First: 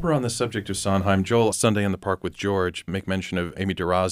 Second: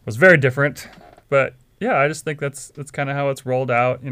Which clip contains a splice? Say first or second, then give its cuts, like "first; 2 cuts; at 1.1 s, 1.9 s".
first; 2 cuts; at 1.5 s, 2.9 s